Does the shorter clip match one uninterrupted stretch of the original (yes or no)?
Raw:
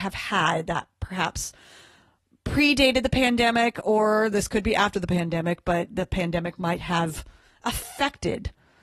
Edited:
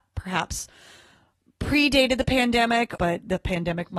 no